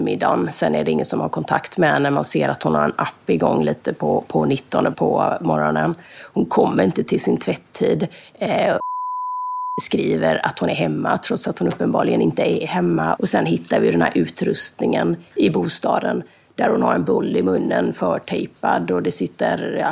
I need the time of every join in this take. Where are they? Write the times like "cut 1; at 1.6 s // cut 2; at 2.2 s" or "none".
cut 1; at 4.9 s // cut 2; at 13.2 s